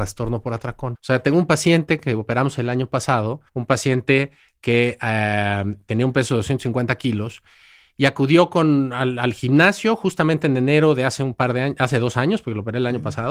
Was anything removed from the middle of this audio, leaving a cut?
yes; 2 cuts; at 0.9 s, 3.5 s

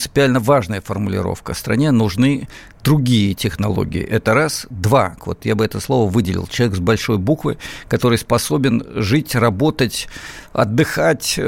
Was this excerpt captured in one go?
no; 1 cut; at 5.2 s

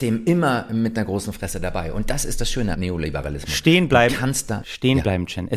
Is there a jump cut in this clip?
no; 0 cuts

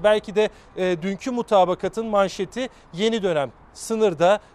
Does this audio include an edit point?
no; 0 cuts

